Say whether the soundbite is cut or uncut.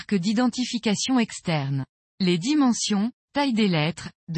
cut